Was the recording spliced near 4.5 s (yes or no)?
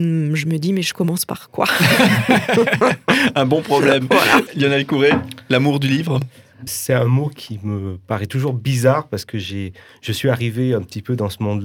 yes